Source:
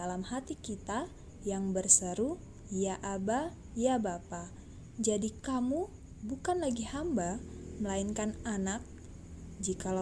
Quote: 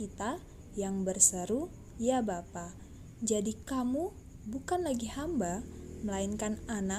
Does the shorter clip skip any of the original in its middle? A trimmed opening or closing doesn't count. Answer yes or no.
yes